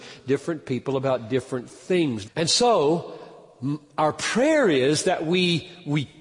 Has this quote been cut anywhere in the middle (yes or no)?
yes